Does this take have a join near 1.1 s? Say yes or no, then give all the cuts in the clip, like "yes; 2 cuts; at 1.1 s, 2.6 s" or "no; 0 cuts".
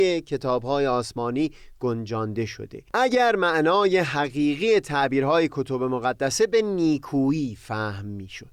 no; 1 cut; at 2.9 s